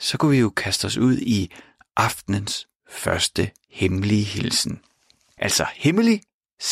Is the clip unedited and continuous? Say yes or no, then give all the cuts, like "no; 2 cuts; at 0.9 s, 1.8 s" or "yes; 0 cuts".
no; 1 cut; at 5.4 s